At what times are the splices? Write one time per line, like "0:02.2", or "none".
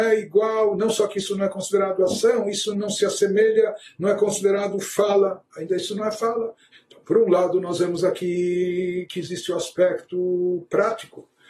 0:02.7
0:06.7

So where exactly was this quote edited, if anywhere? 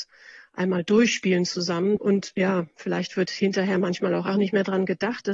0:02.0
0:04.3

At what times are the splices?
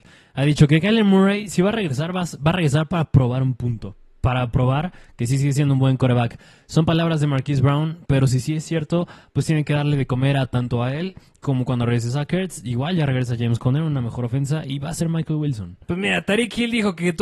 none

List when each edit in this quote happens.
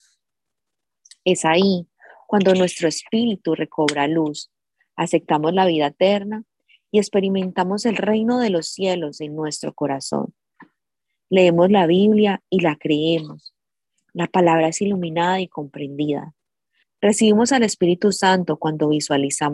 0:16.8

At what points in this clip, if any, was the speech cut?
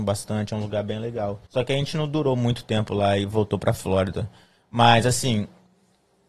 0:01.5

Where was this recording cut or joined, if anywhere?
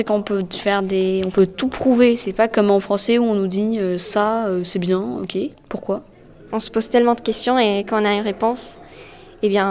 0:05.5

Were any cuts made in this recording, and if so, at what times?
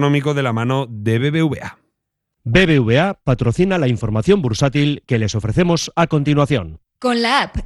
none

